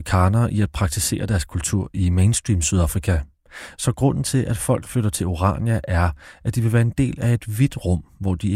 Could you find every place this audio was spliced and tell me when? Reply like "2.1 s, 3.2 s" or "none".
none